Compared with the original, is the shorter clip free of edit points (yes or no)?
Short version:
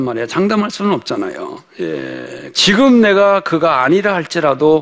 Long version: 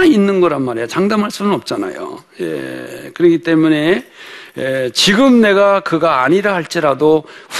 no